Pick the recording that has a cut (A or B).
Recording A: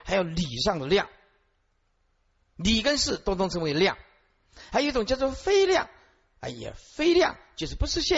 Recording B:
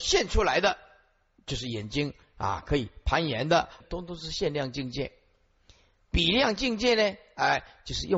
B